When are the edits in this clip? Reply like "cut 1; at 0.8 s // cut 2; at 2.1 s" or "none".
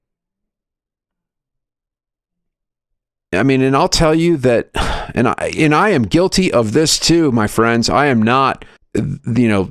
cut 1; at 8.8 s

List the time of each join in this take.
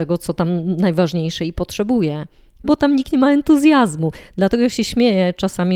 cut 1; at 2.6 s

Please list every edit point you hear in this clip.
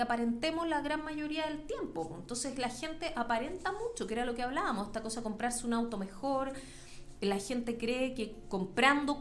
none

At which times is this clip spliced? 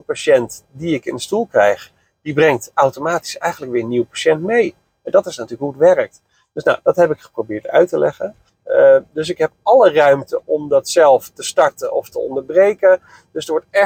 cut 1; at 8.5 s // cut 2; at 10.4 s

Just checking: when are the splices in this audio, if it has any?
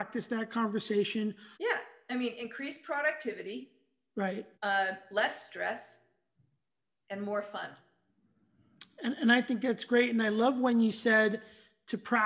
cut 1; at 1.5 s // cut 2; at 4.5 s

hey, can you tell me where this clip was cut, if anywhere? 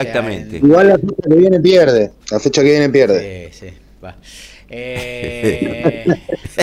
cut 1; at 2.2 s

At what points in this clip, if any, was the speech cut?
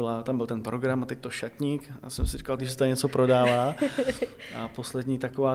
cut 1; at 2.6 s

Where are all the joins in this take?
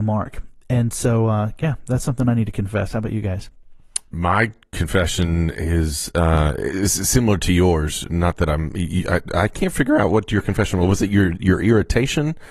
none

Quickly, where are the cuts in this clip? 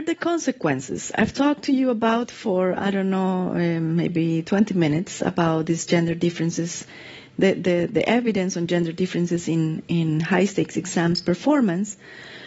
none

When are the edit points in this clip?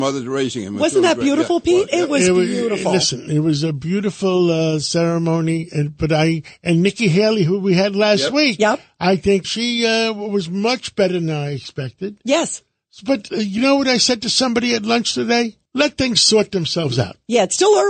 cut 1; at 9.4 s // cut 2; at 15.7 s

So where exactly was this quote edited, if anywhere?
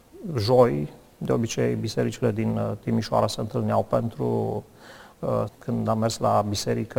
cut 1; at 5.5 s

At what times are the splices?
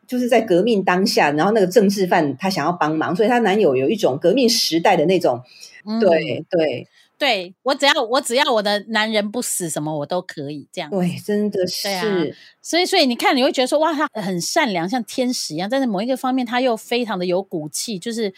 cut 1; at 5.8 s

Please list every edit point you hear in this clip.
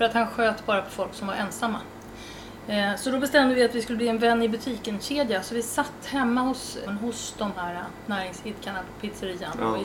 cut 1; at 6.9 s

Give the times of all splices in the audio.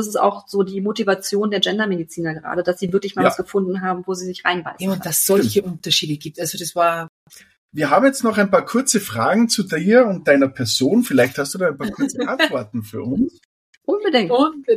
none

